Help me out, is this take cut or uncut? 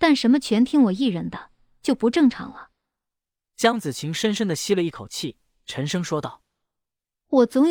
uncut